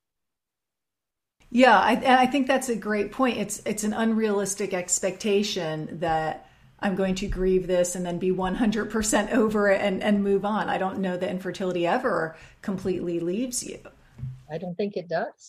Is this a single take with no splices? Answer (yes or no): yes